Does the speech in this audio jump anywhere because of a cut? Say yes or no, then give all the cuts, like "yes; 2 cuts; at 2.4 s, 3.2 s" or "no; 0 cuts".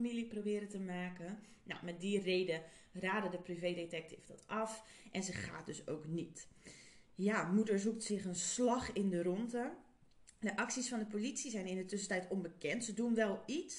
no; 0 cuts